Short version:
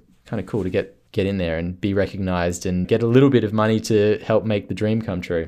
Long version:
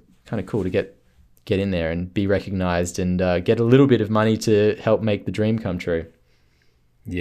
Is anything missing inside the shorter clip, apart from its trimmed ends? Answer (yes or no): yes